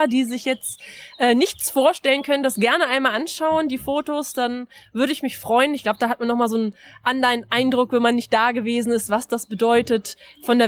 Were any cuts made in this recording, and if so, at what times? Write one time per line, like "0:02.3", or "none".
none